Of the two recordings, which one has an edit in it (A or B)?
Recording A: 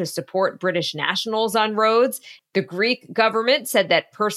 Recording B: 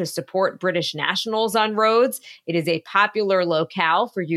A